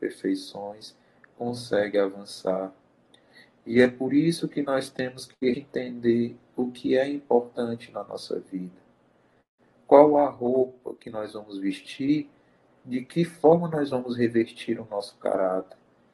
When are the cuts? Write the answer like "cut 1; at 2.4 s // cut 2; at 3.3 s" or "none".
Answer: cut 1; at 5.5 s

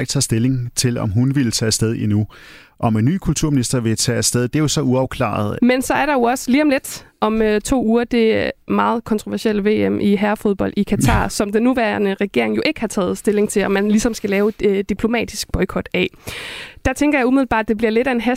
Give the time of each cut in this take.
cut 1; at 5.6 s

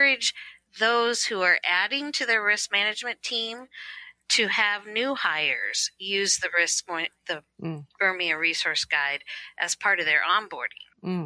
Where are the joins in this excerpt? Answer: none

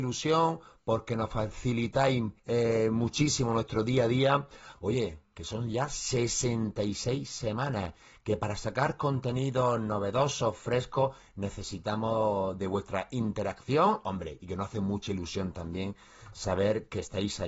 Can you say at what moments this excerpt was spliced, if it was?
cut 1; at 2.4 s // cut 2; at 4.7 s

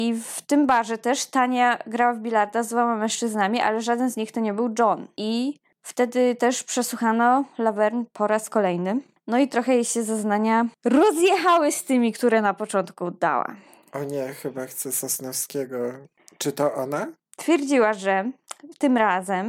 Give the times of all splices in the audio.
none

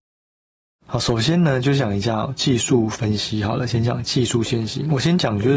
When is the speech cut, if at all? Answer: none

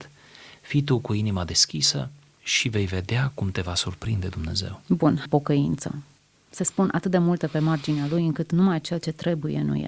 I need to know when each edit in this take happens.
cut 1; at 5.3 s

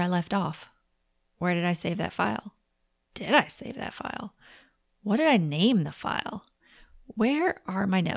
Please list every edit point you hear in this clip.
none

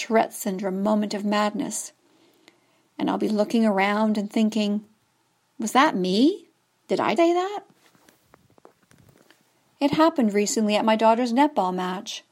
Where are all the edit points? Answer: cut 1; at 7.2 s

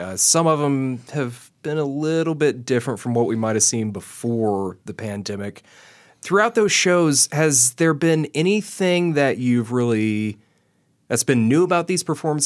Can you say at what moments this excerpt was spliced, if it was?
none

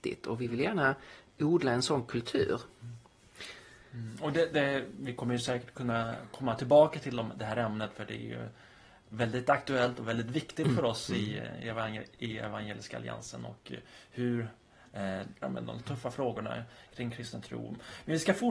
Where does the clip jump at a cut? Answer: cut 1; at 15.4 s

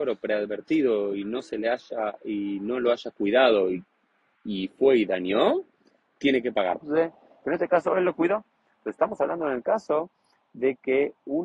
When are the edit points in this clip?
cut 1; at 6.8 s

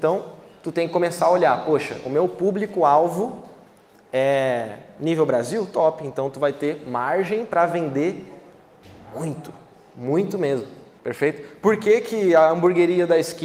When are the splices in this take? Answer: cut 1; at 11.0 s

